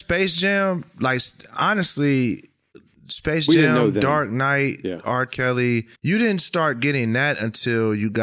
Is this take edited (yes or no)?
yes